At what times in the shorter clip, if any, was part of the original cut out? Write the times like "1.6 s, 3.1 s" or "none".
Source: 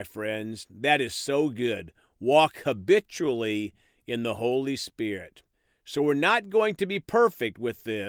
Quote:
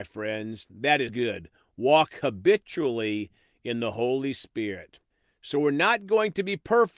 1.1 s